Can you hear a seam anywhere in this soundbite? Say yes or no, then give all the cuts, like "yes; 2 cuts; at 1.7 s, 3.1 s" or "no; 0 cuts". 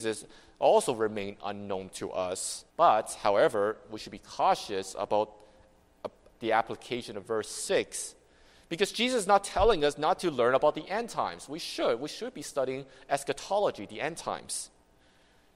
yes; 1 cut; at 2.7 s